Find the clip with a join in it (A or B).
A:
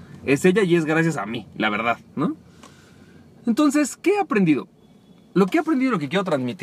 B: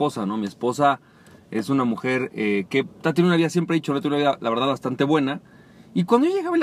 B